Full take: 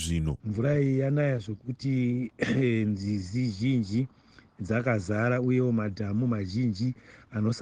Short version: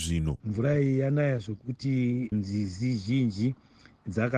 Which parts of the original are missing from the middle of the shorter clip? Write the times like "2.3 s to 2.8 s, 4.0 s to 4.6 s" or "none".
2.3 s to 2.8 s